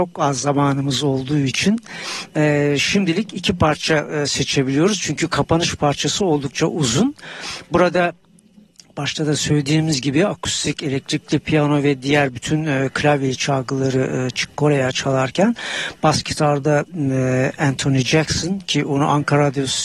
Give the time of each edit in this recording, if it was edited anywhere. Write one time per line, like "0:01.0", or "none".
none